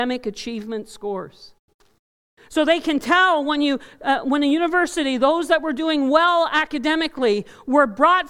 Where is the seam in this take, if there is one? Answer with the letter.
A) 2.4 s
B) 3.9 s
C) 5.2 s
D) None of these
A